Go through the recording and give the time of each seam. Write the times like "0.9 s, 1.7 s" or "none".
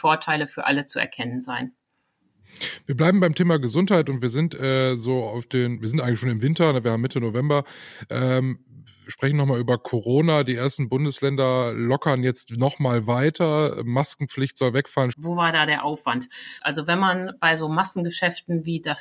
15.1 s, 16.6 s